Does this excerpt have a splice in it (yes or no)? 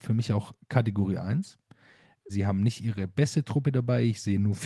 yes